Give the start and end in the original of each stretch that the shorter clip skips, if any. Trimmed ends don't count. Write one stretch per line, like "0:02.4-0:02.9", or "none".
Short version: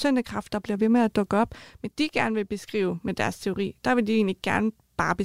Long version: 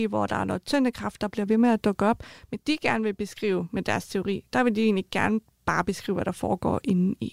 none